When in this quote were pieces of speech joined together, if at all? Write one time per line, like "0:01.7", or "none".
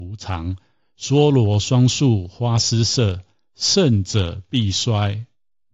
none